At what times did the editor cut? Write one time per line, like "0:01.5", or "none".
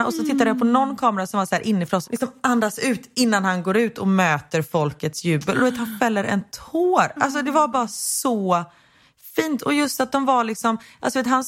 0:02.0
0:09.6